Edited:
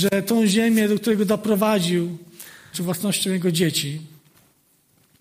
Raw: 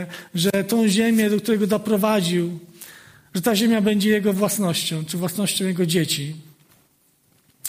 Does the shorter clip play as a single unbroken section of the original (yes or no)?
no